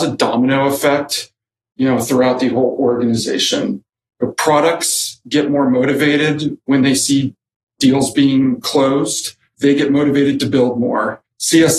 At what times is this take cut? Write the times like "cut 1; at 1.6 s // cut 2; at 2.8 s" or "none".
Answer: cut 1; at 9.5 s